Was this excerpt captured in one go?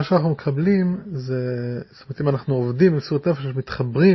yes; 0 cuts

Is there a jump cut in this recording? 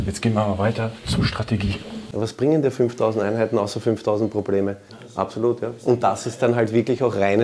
yes; 2 cuts; at 2.1 s, 4.9 s

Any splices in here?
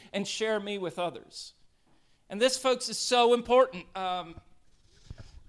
no; 0 cuts

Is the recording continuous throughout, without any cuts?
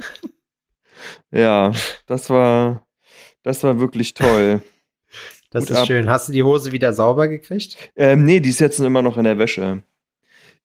yes; 0 cuts

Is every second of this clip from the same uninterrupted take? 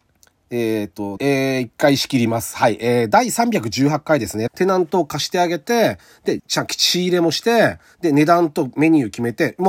no; 3 cuts; at 1.2 s, 4.5 s, 6.4 s

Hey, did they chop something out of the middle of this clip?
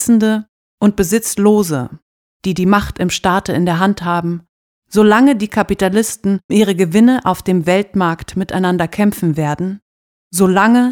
yes; 3 cuts; at 2.3 s, 4.7 s, 6.5 s

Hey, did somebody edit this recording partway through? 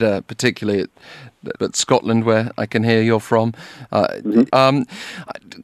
yes; 2 cuts; at 1.6 s, 4.5 s

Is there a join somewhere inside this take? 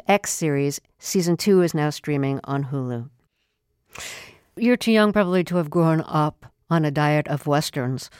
no; 0 cuts

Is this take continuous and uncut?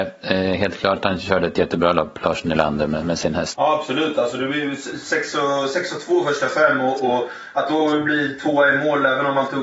no; 1 cut; at 3.5 s

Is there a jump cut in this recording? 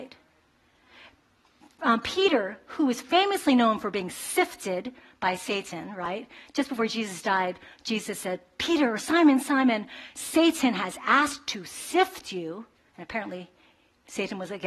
no; 0 cuts

